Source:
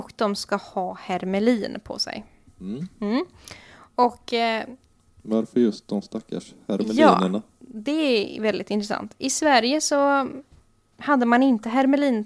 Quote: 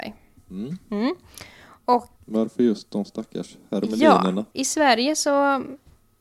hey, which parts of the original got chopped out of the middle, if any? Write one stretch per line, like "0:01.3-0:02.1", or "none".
0:04.3-0:05.1
0:07.5-0:09.2